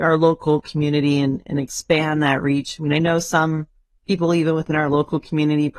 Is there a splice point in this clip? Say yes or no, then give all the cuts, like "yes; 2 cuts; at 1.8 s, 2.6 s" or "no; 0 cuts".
no; 0 cuts